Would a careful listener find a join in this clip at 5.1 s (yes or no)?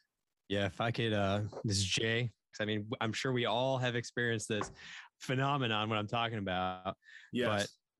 yes